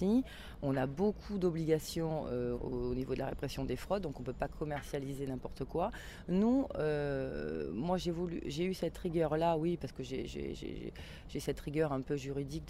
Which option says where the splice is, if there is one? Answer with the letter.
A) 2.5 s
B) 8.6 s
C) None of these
A